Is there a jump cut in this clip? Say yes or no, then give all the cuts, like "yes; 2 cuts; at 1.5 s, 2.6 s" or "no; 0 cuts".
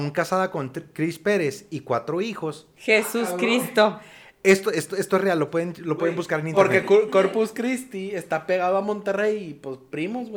no; 0 cuts